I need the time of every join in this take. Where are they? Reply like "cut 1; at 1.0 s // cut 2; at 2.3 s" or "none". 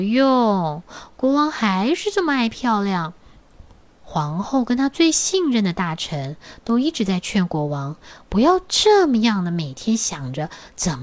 cut 1; at 4.0 s